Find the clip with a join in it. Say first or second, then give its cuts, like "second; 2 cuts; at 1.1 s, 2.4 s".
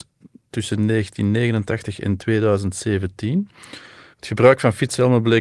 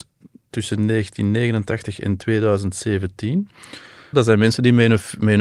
second; 1 cut; at 4.1 s